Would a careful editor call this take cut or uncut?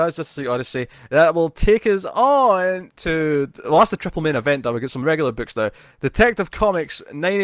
uncut